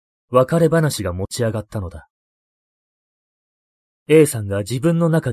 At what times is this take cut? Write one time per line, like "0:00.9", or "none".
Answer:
none